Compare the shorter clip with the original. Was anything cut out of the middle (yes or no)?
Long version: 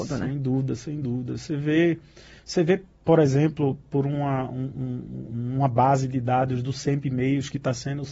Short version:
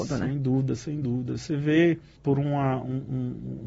yes